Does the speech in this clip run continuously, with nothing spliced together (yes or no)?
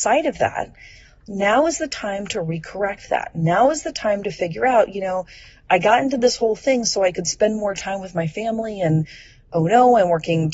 yes